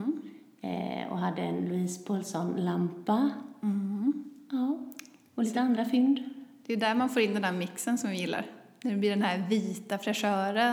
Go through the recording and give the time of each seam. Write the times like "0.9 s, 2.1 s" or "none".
none